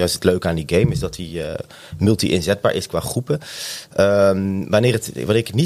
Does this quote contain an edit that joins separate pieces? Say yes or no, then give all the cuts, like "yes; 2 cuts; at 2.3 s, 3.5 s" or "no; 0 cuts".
no; 0 cuts